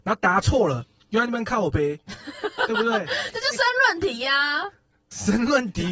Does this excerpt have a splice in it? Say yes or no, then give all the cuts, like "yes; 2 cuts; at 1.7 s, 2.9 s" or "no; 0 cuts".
no; 0 cuts